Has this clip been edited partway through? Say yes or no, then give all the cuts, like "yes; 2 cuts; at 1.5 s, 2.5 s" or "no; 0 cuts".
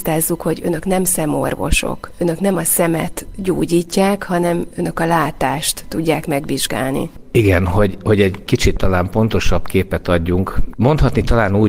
no; 0 cuts